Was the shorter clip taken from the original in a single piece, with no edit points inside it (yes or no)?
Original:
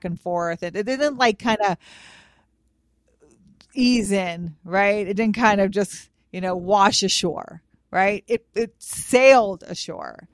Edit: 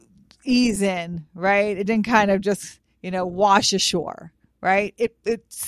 yes